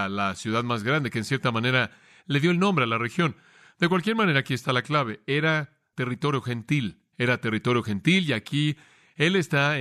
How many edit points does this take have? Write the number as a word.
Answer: zero